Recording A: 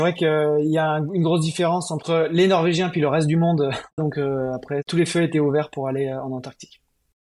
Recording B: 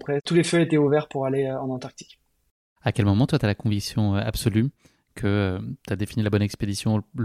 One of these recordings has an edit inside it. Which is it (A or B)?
A